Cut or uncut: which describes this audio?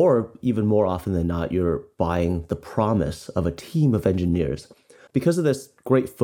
uncut